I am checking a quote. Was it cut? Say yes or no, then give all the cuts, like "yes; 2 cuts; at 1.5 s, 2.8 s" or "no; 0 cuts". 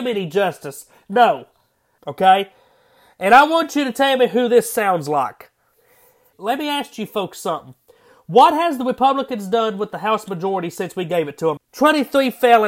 yes; 3 cuts; at 2.0 s, 6.3 s, 11.6 s